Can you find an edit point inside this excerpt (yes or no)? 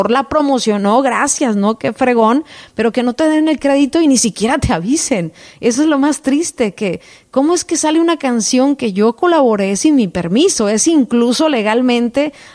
no